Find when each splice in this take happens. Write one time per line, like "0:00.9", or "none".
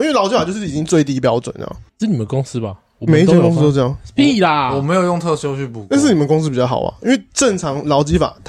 0:01.9